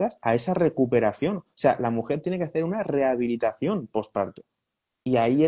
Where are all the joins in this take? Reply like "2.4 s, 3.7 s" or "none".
none